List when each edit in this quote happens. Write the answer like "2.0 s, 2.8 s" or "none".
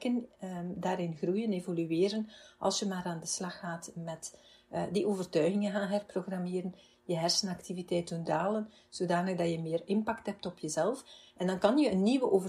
none